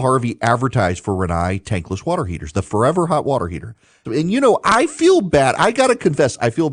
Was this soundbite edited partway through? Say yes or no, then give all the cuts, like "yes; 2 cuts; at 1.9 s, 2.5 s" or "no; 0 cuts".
yes; 1 cut; at 4.0 s